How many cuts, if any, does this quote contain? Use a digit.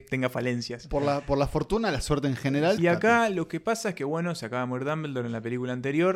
1